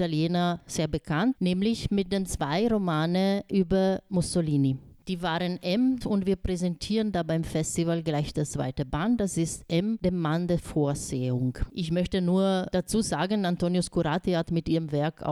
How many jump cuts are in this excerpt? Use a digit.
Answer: 3